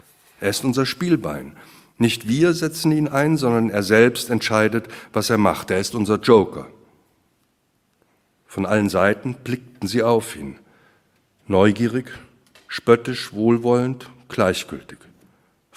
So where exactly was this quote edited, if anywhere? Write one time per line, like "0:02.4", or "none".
none